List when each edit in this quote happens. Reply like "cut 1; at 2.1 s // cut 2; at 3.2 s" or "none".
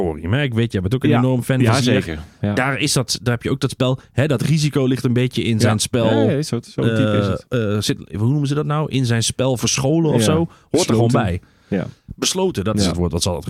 none